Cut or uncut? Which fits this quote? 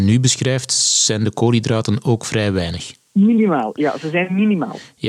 uncut